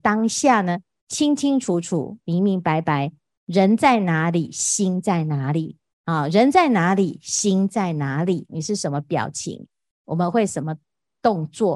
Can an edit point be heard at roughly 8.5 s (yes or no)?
yes